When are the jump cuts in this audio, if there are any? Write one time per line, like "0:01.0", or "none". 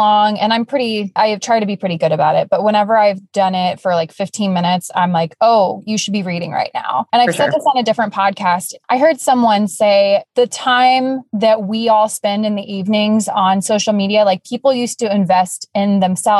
none